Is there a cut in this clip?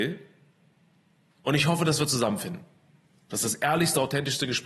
no; 0 cuts

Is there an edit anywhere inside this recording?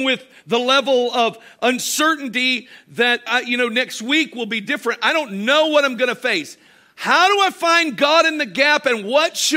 yes; 1 cut; at 3.3 s

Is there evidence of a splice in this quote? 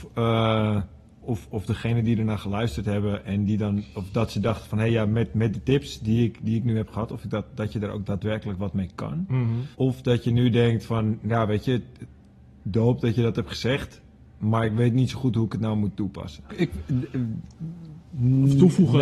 yes; 2 cuts; at 9.7 s, 16.5 s

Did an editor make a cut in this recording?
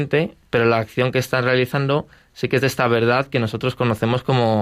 no; 0 cuts

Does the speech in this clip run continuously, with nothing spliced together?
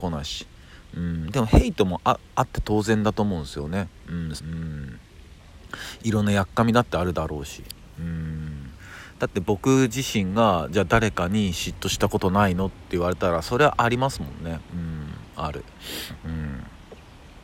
no; 1 cut; at 4.4 s

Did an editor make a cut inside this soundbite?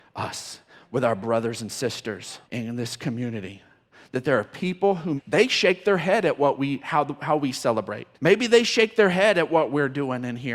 yes; 3 cuts; at 2.4 s, 5.2 s, 8.1 s

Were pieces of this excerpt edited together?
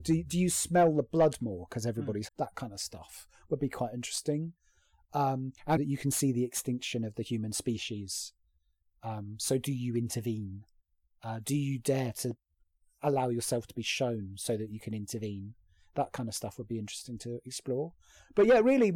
yes; 2 cuts; at 2.3 s, 5.8 s

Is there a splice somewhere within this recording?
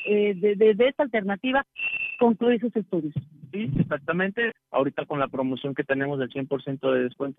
yes; 1 cut; at 4.5 s

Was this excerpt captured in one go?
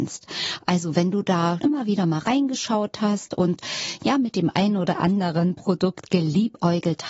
no; 1 cut; at 1.6 s

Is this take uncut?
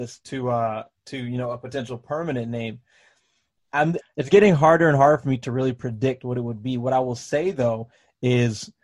no; 1 cut; at 4.0 s

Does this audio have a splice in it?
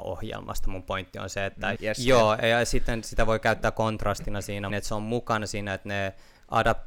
yes; 2 cuts; at 1.8 s, 4.7 s

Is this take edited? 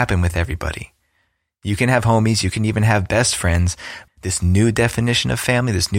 yes; 2 cuts; at 2.4 s, 4.1 s

